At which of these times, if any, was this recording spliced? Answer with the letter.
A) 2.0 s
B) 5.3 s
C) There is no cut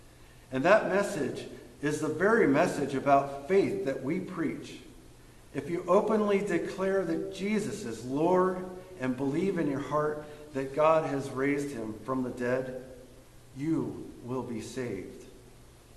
C